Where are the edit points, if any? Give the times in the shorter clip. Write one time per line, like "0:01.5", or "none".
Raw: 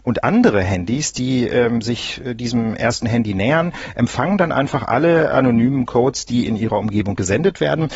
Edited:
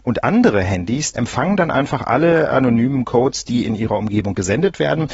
0:01.1